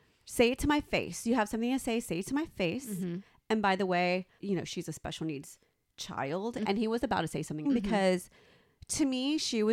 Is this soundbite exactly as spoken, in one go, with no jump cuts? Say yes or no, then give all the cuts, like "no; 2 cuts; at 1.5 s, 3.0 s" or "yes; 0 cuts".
no; 3 cuts; at 4.4 s, 6.6 s, 7.6 s